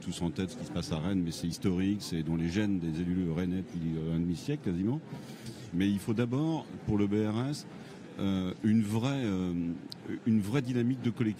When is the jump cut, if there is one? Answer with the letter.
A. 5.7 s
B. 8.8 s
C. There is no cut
A